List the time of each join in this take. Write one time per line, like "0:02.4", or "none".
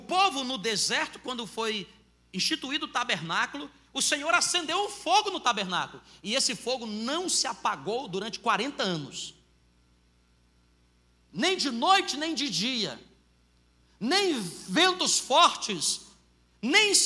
none